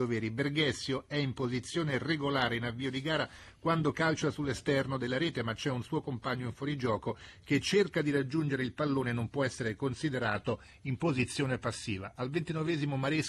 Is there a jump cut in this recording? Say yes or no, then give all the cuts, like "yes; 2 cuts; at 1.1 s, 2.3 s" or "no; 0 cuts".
no; 0 cuts